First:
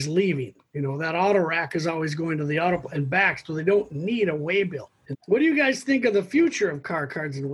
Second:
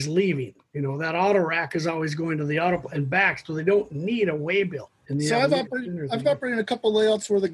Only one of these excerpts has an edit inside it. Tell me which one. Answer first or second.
first